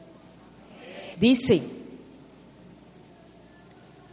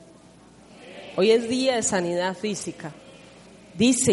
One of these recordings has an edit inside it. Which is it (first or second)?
first